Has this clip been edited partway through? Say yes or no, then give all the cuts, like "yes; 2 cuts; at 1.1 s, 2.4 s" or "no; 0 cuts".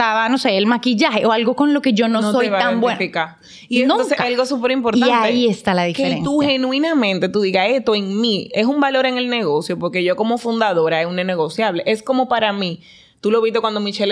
yes; 1 cut; at 13.1 s